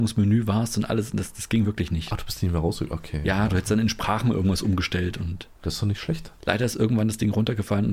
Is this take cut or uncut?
cut